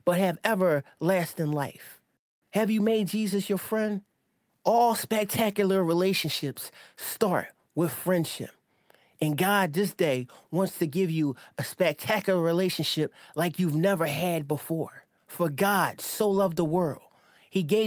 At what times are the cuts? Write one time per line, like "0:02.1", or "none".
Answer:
0:04.5